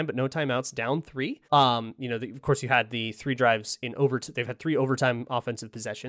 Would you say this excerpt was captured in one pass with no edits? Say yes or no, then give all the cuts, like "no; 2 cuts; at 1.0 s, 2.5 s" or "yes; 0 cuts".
no; 1 cut; at 1.4 s